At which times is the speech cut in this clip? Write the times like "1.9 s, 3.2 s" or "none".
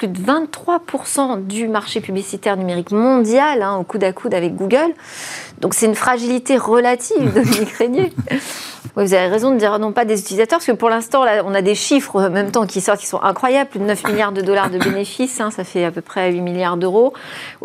8.9 s